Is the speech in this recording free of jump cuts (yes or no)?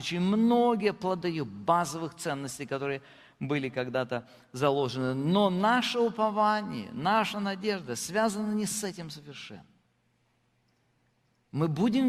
no